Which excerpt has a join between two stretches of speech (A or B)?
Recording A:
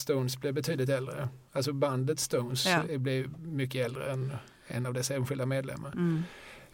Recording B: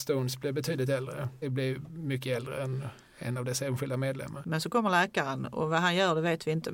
B